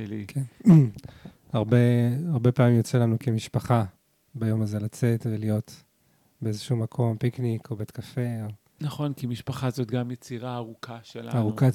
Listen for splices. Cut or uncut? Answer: uncut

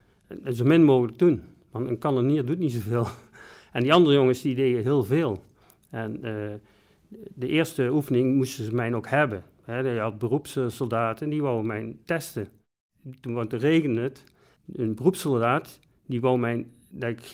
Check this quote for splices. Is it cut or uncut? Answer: uncut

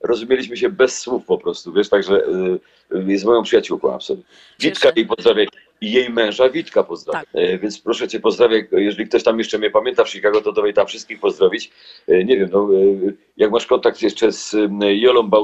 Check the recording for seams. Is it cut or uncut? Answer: cut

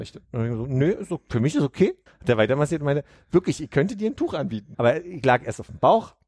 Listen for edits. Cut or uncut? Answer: cut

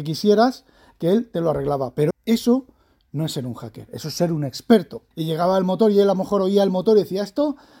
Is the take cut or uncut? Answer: cut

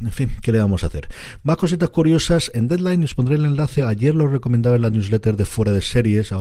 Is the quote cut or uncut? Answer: uncut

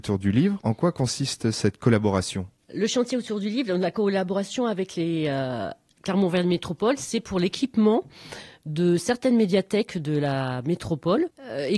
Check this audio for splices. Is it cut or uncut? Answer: uncut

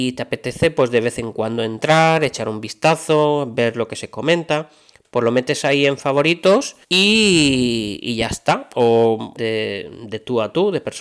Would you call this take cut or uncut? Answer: cut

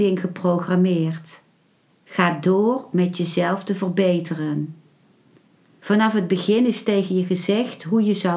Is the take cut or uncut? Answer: cut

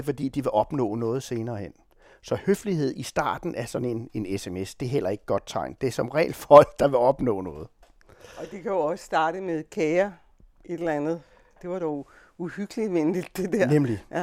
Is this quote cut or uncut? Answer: uncut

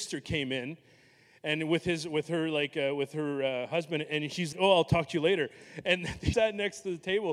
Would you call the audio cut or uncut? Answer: cut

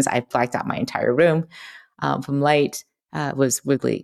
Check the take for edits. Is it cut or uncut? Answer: cut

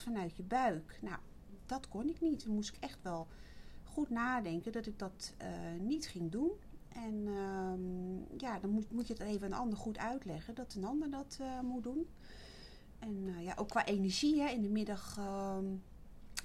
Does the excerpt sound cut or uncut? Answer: uncut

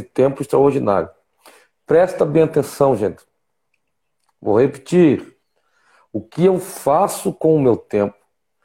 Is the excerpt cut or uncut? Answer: cut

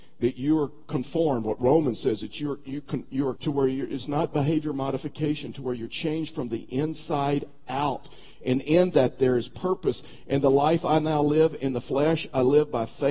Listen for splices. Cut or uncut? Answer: cut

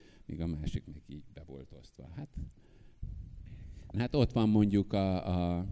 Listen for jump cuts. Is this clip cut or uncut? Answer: cut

